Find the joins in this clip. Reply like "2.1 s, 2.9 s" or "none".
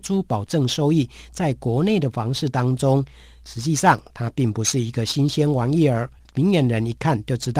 6.2 s